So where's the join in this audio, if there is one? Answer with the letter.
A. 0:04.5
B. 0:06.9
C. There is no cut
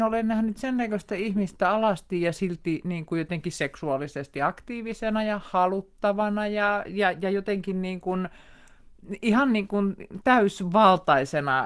B